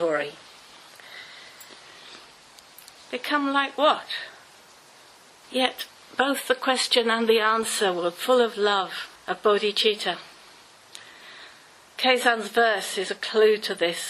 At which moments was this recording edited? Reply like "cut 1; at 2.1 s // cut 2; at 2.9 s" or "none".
cut 1; at 3.0 s // cut 2; at 5.4 s // cut 3; at 9.2 s